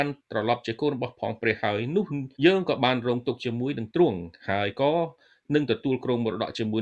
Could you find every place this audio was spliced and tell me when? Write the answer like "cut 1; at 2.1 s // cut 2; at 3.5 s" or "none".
cut 1; at 2.4 s